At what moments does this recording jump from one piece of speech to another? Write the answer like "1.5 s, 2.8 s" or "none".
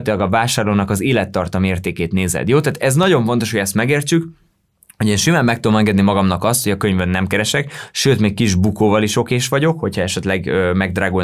none